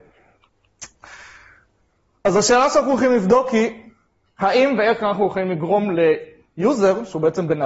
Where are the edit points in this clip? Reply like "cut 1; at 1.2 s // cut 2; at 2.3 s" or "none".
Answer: none

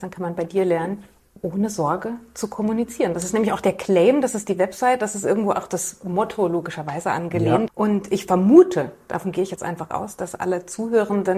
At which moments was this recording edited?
cut 1; at 7.7 s

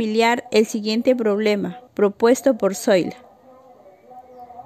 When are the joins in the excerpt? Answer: cut 1; at 1.9 s

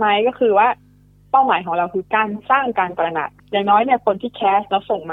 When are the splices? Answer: cut 1; at 3.4 s

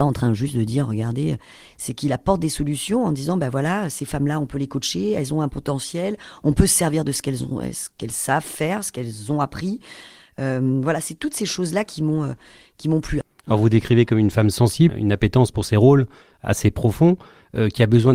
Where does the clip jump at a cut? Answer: cut 1; at 13.2 s // cut 2; at 14.9 s

